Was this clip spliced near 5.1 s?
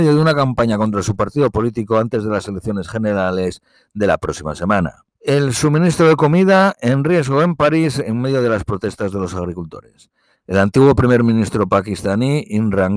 yes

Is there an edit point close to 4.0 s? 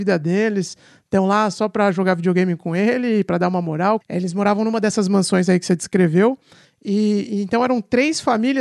yes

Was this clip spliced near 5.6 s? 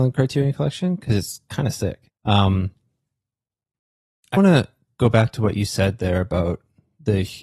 no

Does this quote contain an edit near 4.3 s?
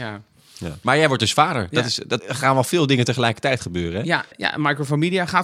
yes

